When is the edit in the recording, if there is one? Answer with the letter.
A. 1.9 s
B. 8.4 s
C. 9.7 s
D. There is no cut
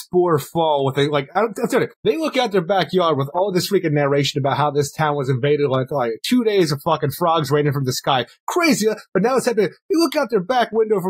A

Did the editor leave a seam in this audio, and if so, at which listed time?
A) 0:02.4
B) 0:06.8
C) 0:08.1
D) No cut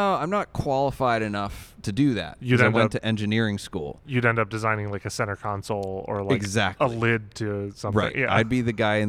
D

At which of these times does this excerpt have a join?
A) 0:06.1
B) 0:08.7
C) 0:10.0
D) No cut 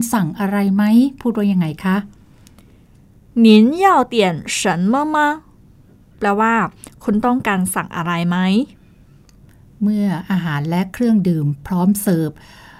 A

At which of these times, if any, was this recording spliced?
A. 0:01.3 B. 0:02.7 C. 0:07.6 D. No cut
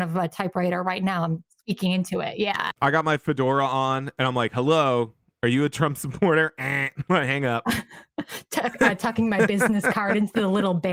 D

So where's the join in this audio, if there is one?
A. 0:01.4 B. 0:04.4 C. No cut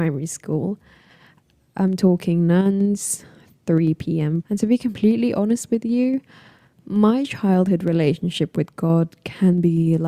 B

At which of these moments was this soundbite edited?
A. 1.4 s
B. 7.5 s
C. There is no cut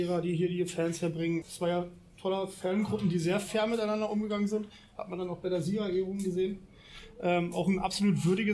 A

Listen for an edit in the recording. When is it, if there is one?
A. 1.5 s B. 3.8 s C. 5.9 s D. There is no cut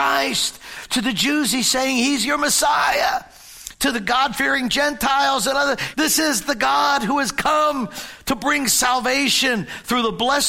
C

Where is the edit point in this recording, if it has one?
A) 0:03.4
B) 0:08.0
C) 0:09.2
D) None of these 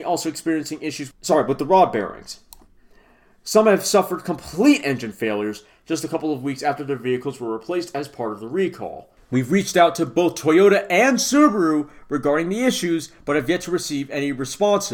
D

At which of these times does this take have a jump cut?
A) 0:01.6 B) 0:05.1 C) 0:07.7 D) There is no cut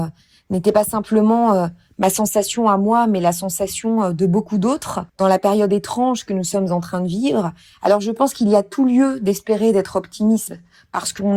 B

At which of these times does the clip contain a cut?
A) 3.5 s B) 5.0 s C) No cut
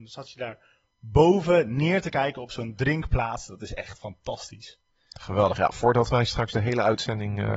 C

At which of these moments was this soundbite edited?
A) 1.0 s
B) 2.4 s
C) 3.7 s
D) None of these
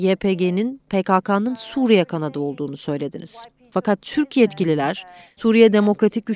C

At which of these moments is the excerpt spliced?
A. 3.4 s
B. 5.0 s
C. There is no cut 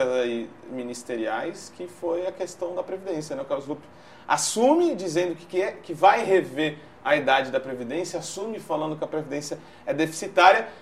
C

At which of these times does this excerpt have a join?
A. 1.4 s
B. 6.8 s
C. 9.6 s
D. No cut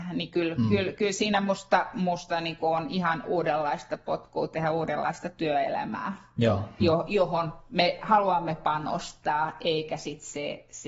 B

